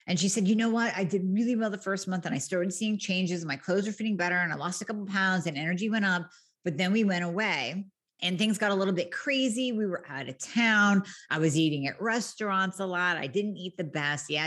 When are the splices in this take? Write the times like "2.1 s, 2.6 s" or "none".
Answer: none